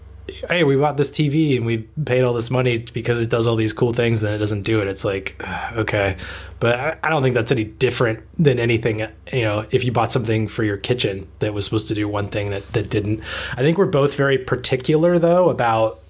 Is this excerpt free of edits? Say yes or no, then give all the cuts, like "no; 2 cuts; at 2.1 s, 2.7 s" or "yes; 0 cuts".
yes; 0 cuts